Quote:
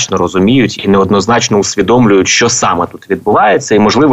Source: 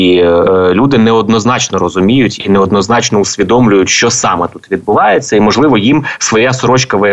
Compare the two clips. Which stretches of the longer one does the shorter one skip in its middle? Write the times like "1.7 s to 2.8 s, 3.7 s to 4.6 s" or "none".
none